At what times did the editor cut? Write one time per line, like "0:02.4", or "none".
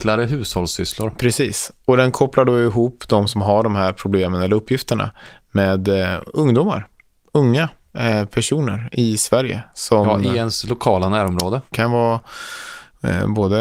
0:11.7